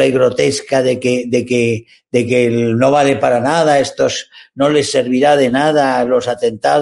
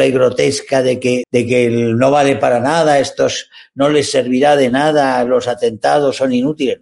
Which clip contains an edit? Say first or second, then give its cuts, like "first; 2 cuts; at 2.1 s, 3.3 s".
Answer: second; 1 cut; at 1.2 s